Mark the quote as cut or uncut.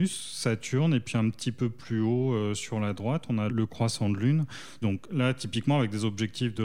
cut